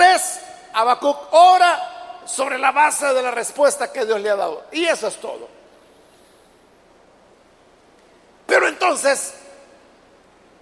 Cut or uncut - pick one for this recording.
uncut